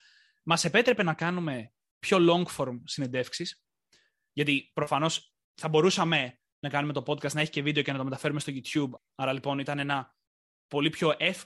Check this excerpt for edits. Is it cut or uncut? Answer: cut